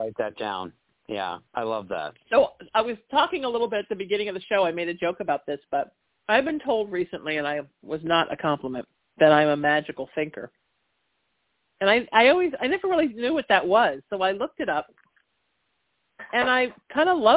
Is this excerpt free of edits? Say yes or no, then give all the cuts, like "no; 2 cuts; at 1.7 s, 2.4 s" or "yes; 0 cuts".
no; 1 cut; at 1.5 s